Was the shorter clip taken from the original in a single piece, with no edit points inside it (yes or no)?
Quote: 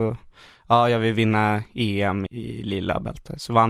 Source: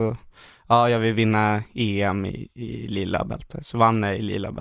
no